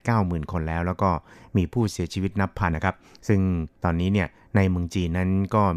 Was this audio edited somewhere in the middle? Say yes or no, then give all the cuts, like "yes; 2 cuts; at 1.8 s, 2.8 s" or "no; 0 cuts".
yes; 1 cut; at 2.7 s